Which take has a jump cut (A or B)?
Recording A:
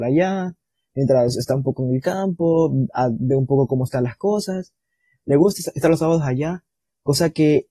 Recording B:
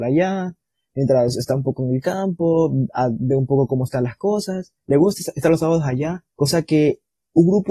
B